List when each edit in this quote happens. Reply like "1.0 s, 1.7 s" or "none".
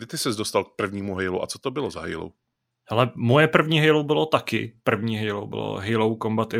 none